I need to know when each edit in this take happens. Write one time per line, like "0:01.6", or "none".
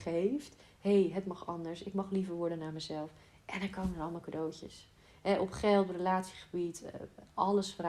none